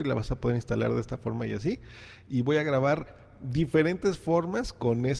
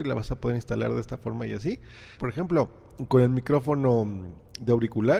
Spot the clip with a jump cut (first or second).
second